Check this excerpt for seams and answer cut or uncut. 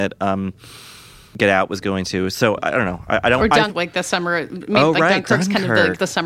cut